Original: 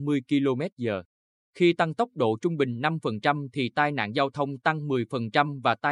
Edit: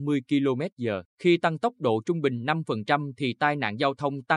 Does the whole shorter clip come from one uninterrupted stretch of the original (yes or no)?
no